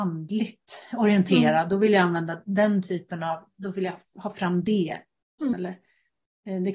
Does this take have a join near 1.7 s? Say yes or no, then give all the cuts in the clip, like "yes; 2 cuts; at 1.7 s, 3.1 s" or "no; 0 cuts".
no; 1 cut; at 5.5 s